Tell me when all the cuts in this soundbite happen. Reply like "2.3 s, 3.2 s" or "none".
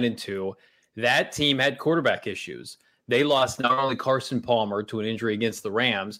none